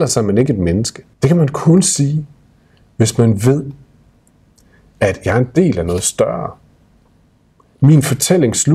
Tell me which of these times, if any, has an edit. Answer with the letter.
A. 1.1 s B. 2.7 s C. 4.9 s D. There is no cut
A